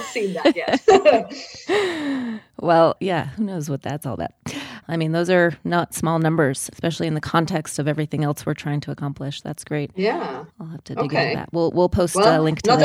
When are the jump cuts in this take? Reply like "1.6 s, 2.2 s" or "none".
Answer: 3.0 s, 4.8 s, 6.7 s